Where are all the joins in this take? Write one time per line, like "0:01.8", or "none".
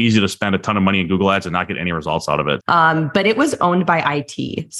0:02.6